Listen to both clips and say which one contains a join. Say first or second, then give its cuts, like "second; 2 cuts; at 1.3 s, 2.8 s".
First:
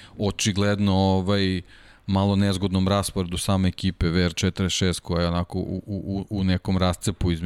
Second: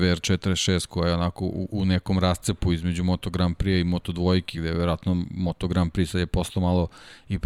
second; 2 cuts; at 1.7 s, 4.5 s